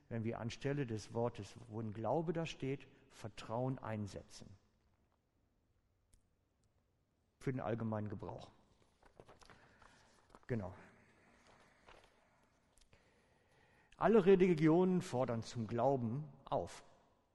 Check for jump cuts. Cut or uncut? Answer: uncut